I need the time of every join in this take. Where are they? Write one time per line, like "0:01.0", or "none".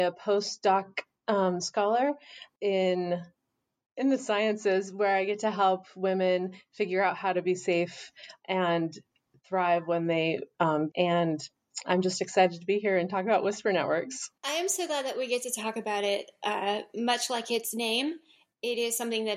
0:10.9